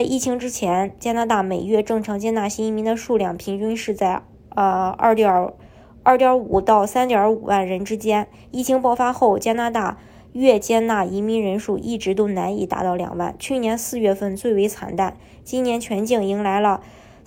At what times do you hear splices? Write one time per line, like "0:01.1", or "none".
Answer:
none

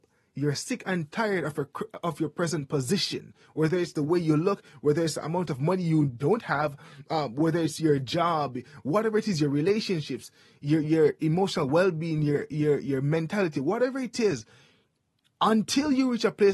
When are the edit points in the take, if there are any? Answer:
none

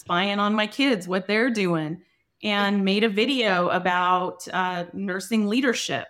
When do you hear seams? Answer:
none

